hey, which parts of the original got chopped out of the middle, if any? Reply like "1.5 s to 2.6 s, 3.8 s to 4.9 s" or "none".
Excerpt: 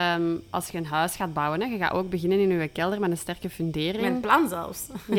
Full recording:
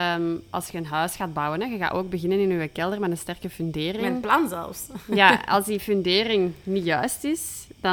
none